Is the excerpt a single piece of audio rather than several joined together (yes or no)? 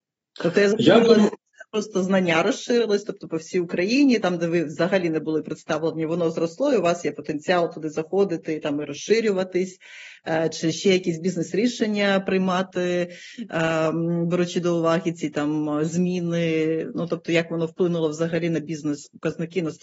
no